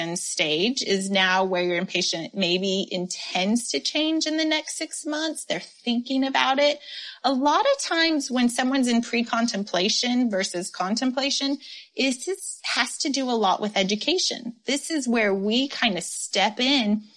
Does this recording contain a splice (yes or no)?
no